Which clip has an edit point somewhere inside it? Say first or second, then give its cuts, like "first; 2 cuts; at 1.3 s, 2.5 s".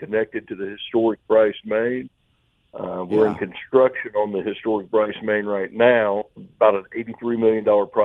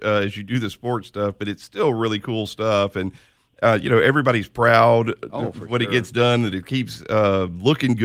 first; 1 cut; at 6.3 s